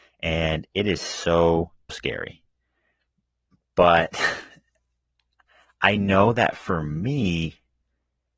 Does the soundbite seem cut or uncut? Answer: cut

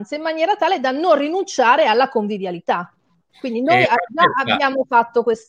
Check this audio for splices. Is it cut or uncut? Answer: uncut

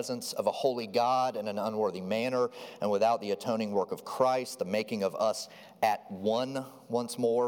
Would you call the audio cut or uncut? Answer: uncut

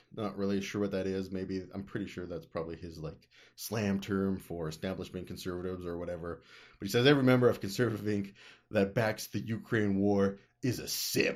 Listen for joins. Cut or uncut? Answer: uncut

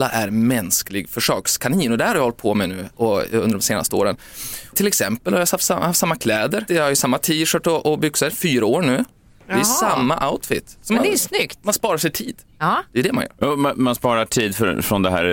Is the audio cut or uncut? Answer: cut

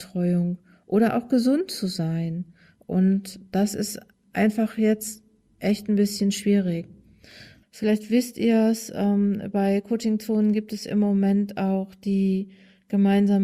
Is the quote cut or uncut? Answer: cut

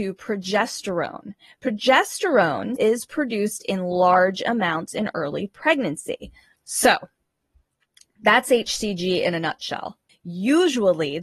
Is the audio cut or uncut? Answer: cut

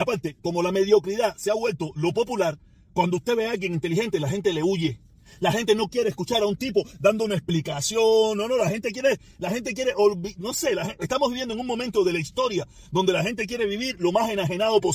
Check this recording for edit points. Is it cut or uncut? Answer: uncut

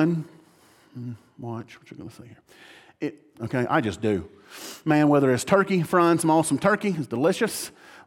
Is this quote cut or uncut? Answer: cut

